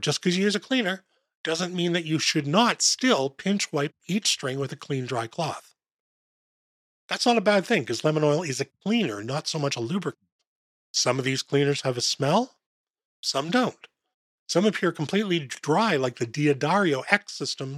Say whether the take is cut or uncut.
cut